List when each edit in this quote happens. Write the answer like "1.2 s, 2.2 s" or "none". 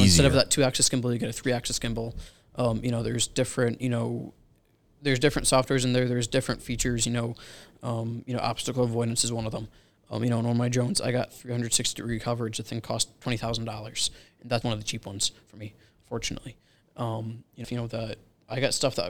14.6 s, 17.6 s